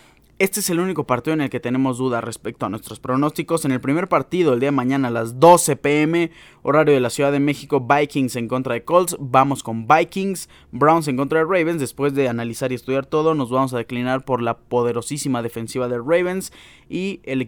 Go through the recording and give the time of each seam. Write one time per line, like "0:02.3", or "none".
none